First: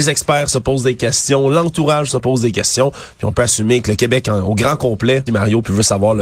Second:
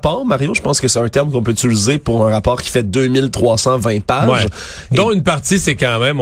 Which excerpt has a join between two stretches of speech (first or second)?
first